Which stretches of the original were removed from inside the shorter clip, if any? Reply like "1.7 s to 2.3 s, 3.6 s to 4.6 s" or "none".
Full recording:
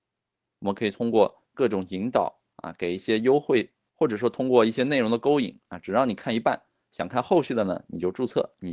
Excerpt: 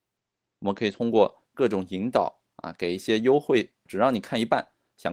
3.9 s to 5.8 s